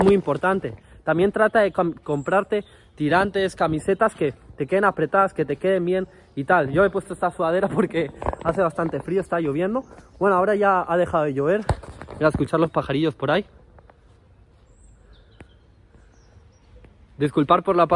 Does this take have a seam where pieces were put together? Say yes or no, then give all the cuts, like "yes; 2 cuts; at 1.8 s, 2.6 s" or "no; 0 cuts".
no; 0 cuts